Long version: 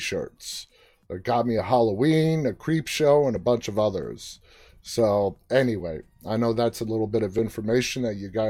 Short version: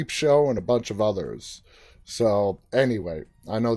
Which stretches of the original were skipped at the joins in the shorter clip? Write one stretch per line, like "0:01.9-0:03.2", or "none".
none